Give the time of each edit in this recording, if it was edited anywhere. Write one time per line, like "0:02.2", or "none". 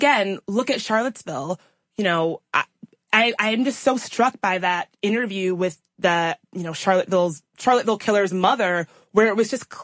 none

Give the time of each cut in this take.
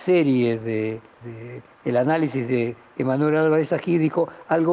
0:01.2

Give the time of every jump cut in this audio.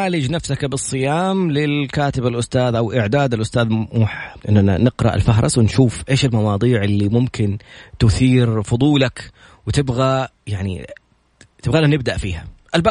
0:04.4
0:10.4

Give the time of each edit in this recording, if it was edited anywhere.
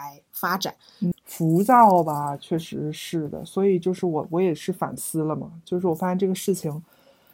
0:01.1

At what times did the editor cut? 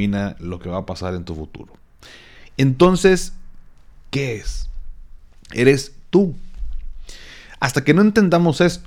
none

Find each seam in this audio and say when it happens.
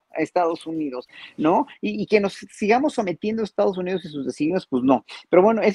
none

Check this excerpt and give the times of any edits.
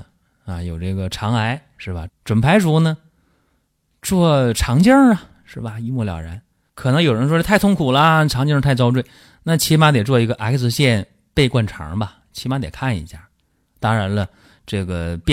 0:02.1

